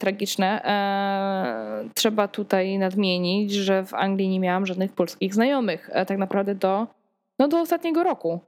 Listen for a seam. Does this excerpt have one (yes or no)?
no